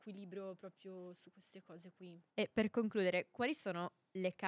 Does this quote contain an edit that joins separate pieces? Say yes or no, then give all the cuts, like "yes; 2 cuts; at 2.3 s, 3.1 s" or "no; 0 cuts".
yes; 1 cut; at 2.3 s